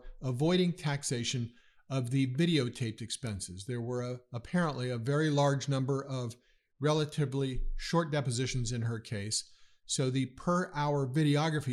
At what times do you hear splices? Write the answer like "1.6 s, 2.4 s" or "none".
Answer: none